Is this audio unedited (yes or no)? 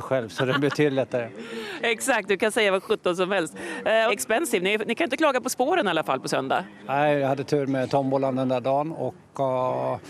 no